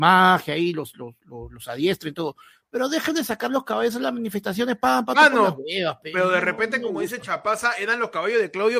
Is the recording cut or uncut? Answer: uncut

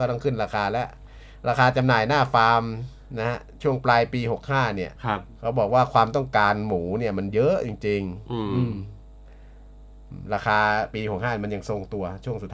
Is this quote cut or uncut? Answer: cut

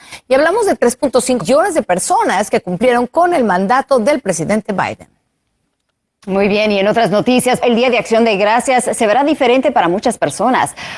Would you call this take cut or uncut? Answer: cut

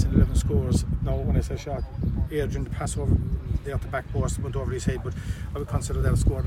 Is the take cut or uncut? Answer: uncut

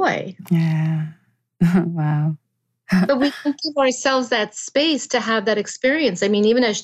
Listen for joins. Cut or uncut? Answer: uncut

